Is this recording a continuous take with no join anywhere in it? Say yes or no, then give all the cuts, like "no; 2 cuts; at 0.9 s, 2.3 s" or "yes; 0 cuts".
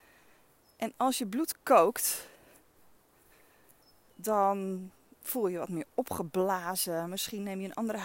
yes; 0 cuts